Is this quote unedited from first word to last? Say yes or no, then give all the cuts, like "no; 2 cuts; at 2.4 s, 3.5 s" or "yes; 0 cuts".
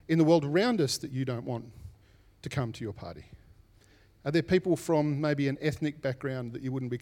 yes; 0 cuts